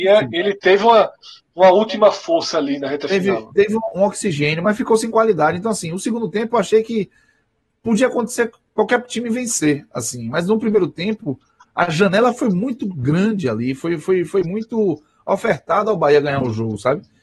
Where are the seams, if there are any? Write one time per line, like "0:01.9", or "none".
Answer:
none